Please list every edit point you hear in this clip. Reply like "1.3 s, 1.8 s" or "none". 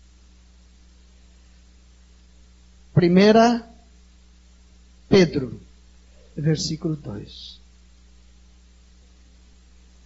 6.3 s

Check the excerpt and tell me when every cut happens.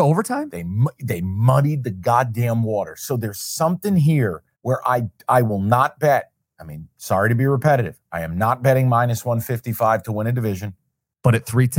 4.5 s

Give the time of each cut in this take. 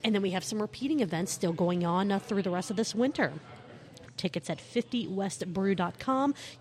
4.1 s

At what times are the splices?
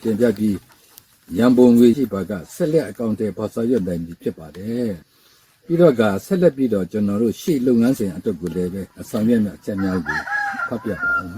1.9 s, 5.0 s, 8.9 s

